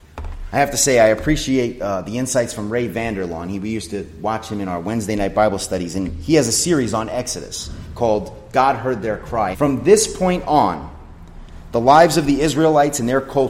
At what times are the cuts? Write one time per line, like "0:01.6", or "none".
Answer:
0:09.5